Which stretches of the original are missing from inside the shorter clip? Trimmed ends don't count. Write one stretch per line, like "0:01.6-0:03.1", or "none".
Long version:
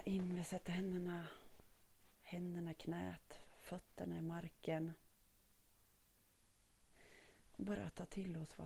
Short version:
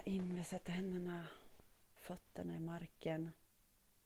0:02.0-0:03.6